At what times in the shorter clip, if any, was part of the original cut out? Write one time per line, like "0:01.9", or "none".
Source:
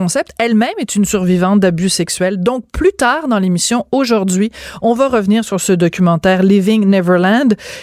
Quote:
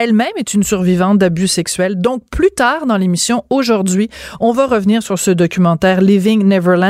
none